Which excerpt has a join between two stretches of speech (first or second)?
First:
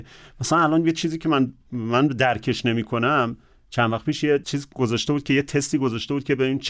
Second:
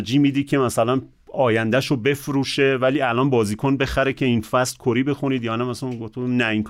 first